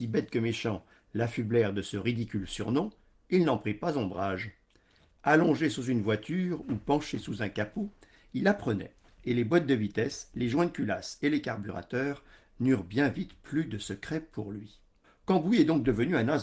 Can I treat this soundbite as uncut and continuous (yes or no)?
yes